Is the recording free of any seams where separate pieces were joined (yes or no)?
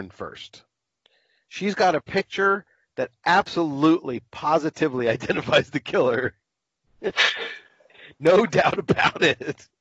yes